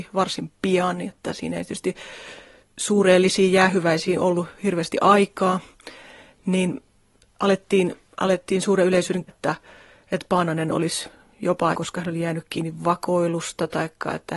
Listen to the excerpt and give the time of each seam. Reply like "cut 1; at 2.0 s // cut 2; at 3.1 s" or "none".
cut 1; at 9.3 s // cut 2; at 11.7 s